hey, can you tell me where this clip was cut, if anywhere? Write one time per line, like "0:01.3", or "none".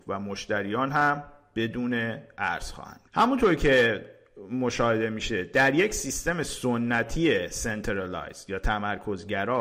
0:03.1